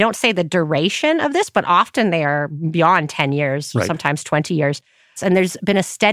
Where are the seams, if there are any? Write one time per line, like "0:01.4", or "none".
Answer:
0:05.2